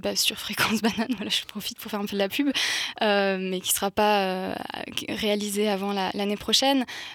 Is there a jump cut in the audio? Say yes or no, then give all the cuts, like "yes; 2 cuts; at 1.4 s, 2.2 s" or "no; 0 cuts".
no; 0 cuts